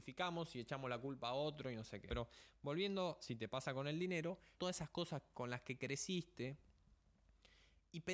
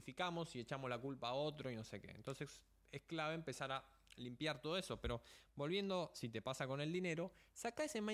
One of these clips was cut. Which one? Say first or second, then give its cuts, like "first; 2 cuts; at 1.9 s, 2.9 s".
first; 2 cuts; at 2.1 s, 4.6 s